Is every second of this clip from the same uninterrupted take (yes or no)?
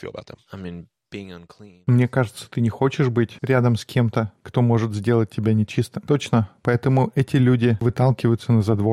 yes